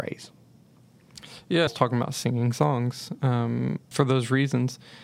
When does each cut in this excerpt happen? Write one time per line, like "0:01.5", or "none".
0:01.7
0:03.9